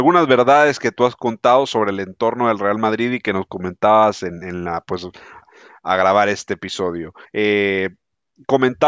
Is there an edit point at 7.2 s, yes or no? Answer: yes